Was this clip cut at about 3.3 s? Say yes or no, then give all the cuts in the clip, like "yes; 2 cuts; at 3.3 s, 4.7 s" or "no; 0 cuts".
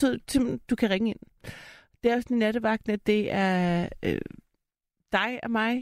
no; 0 cuts